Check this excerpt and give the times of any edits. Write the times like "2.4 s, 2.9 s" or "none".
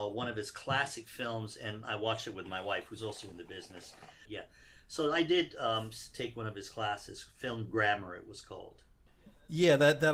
4.3 s